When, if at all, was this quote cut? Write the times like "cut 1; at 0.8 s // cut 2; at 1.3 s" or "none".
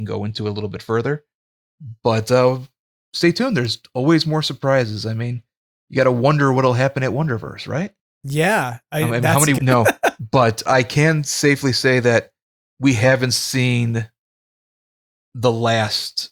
cut 1; at 9.6 s